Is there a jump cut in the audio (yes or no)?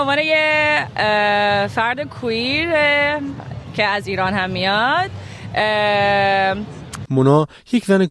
yes